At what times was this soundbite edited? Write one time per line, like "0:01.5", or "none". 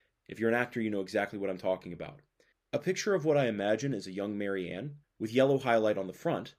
0:02.5
0:05.0

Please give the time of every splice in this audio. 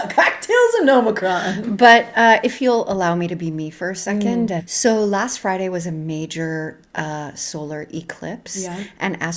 0:04.6

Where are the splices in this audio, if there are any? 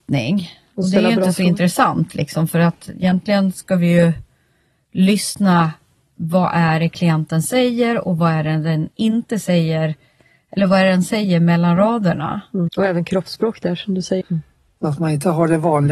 0:12.7
0:14.2

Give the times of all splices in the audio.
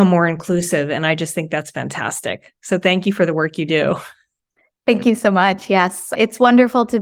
none

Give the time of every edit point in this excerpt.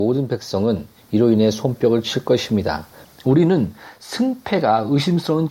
0:03.0

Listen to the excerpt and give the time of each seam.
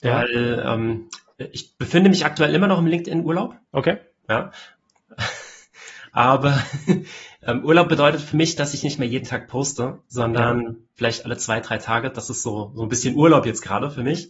0:03.6

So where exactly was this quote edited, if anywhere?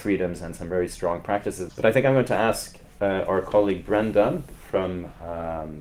0:01.7

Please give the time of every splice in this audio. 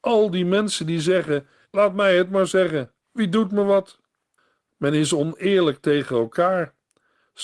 0:01.6
0:04.7

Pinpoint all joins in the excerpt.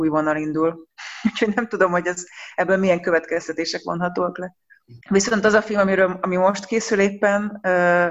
0:05.0

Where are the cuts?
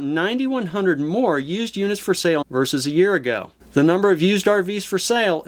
0:02.4
0:03.6

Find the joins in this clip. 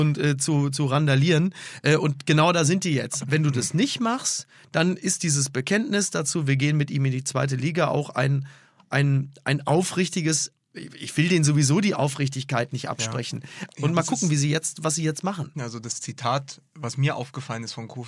0:03.2
0:13.7
0:15.5

